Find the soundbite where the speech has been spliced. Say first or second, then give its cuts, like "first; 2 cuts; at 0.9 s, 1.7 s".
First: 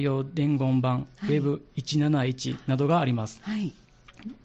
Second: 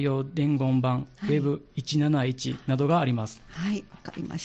second; 1 cut; at 3.4 s